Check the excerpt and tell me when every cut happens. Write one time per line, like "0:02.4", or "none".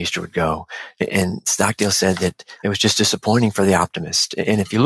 none